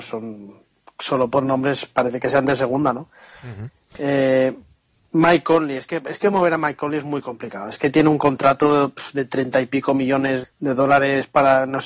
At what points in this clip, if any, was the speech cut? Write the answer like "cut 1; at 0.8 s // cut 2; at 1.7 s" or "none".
cut 1; at 10.4 s